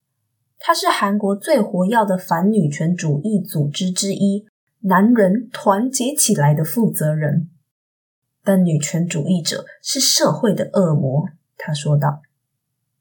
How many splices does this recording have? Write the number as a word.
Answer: zero